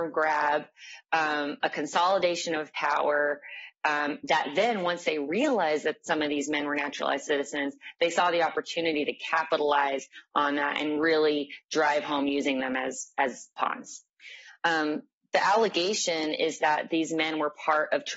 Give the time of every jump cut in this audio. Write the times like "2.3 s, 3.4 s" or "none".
none